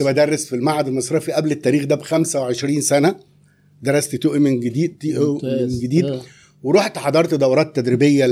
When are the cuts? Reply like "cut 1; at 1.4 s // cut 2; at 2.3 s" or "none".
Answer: none